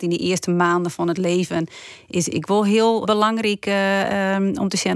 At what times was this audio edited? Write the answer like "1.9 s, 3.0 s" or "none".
3.0 s